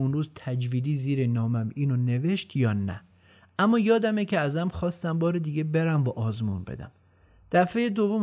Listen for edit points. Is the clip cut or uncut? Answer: uncut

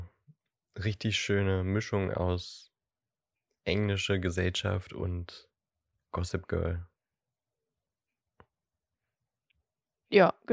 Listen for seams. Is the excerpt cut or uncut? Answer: uncut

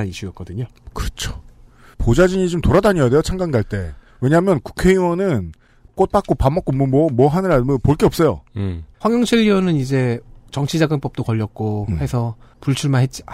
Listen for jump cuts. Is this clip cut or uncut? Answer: cut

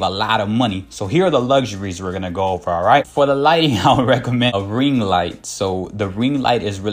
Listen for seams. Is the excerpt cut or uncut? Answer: uncut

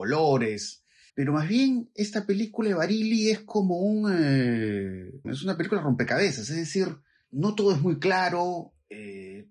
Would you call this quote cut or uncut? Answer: cut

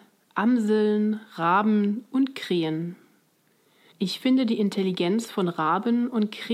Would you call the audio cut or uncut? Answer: cut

